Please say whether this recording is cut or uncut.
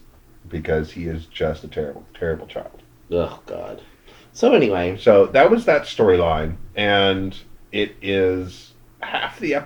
uncut